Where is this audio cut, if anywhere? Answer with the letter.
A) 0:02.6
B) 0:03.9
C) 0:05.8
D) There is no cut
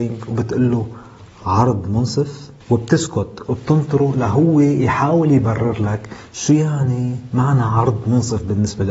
A